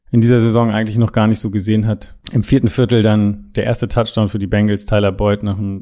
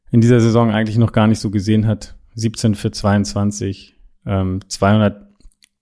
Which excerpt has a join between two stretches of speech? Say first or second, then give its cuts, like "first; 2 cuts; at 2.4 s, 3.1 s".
first; 1 cut; at 2.2 s